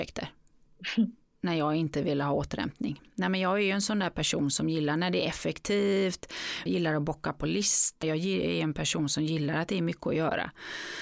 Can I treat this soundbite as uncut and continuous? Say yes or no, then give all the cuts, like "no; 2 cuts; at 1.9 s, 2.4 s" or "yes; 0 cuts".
no; 2 cuts; at 6.7 s, 8.0 s